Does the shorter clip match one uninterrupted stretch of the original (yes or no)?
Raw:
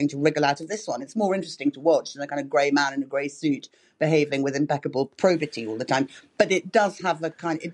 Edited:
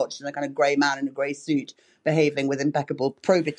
yes